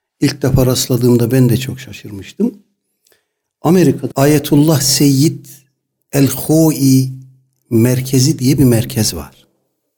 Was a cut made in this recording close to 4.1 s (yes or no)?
yes